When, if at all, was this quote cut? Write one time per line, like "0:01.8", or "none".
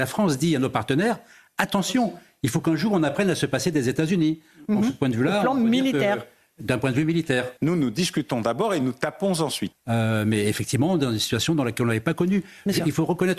0:07.6
0:09.7